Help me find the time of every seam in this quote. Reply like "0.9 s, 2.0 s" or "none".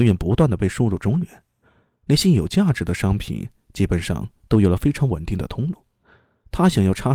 none